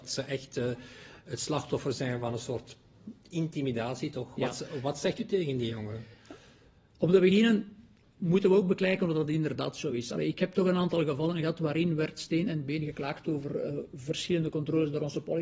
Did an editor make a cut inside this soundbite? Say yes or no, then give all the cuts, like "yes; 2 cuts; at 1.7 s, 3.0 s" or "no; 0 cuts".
no; 0 cuts